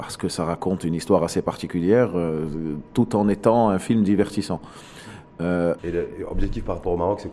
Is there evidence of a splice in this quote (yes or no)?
yes